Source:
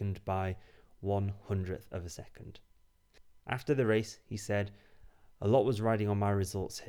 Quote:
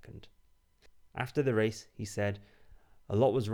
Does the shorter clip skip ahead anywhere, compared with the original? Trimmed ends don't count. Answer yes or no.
no